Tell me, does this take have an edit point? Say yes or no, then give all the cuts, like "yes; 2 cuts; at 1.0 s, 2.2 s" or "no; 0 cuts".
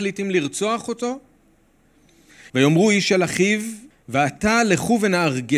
yes; 2 cuts; at 2.5 s, 3.9 s